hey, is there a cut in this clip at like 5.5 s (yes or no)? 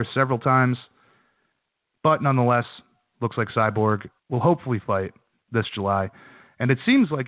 no